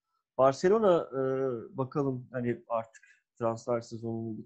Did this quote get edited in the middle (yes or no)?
no